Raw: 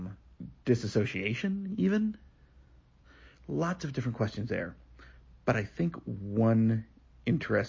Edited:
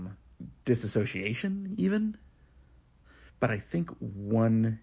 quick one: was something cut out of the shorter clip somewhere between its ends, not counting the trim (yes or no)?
yes